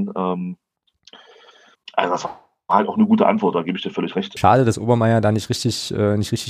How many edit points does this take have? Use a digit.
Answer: 2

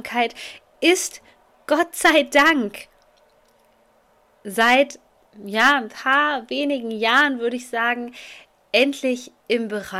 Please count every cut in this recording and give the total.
0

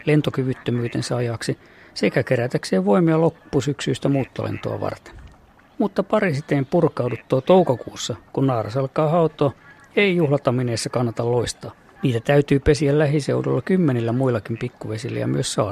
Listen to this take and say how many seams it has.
2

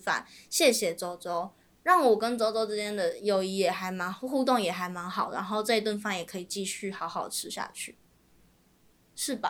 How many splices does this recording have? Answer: 0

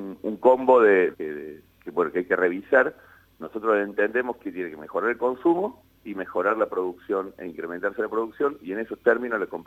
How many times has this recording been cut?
1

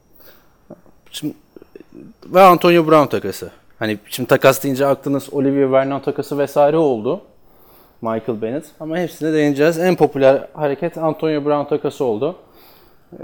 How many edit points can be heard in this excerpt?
0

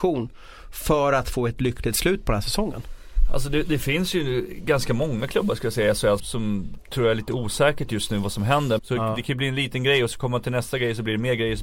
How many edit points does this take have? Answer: 2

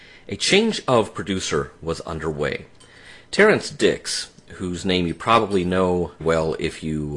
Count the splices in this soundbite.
2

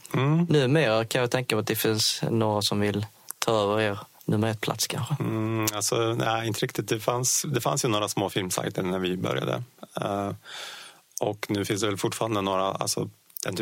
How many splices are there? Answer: 0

